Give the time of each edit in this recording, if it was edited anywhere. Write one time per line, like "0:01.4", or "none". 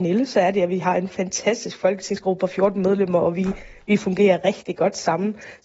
none